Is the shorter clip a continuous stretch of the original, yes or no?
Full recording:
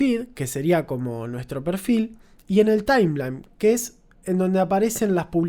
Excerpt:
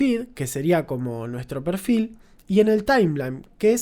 yes